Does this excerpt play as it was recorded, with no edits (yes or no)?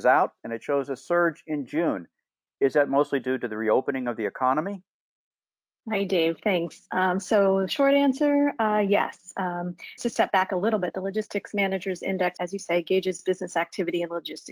no